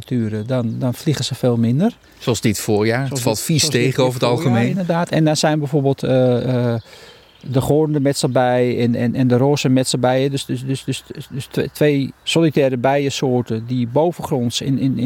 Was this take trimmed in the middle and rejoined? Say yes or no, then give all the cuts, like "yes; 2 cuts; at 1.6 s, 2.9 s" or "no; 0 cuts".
no; 0 cuts